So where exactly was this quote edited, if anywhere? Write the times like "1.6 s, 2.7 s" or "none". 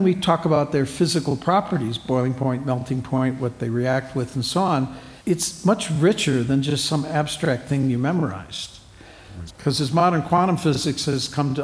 5.2 s, 9.5 s